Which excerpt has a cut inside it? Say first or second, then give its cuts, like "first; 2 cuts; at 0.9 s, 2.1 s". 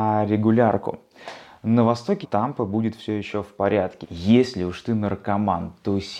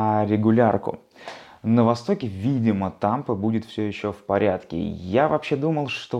first; 2 cuts; at 2.2 s, 4.0 s